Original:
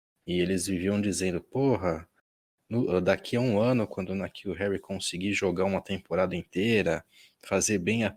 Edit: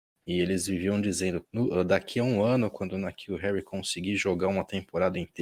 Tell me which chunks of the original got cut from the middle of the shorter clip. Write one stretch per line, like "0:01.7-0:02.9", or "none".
0:01.4-0:02.6